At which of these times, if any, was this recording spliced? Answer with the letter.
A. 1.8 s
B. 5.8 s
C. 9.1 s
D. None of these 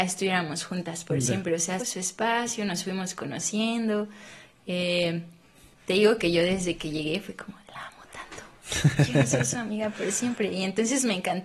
A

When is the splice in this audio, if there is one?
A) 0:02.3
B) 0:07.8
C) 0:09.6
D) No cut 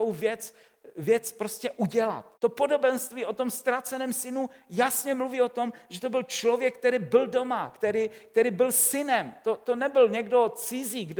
A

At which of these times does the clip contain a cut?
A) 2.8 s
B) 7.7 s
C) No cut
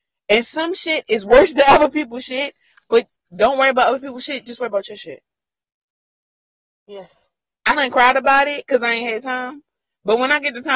B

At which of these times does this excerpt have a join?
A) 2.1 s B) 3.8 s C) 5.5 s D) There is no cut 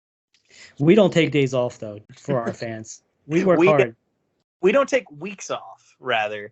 A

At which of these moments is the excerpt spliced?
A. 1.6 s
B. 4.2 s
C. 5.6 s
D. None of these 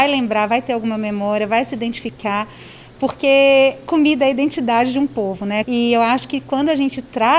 C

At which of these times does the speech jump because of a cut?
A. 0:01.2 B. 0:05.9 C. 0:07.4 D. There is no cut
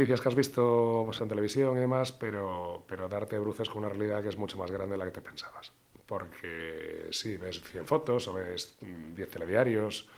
A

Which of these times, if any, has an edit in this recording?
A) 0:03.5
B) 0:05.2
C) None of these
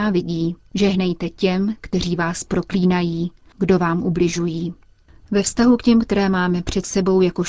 A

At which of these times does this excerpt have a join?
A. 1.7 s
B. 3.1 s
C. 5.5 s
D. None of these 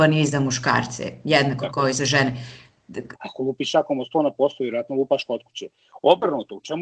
B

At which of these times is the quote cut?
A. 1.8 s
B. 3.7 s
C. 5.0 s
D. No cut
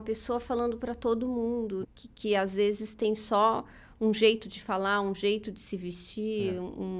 A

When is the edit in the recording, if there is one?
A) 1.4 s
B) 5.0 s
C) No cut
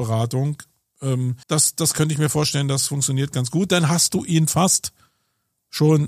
A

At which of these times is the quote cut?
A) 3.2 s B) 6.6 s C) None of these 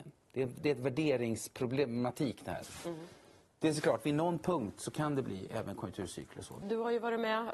B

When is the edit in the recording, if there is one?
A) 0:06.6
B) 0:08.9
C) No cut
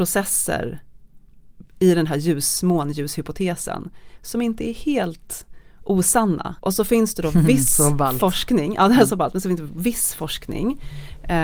A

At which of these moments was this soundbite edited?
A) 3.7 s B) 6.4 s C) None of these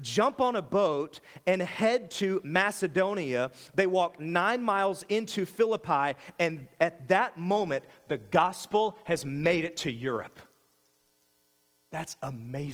C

